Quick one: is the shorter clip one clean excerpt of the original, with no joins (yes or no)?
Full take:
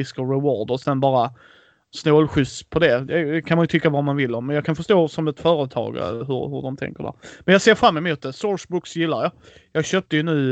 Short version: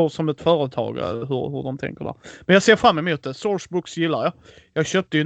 yes